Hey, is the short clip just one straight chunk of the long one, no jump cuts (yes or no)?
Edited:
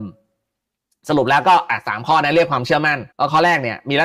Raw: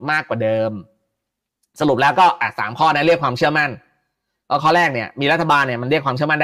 no